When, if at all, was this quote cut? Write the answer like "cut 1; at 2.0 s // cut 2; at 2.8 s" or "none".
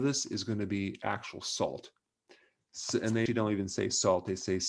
cut 1; at 3.3 s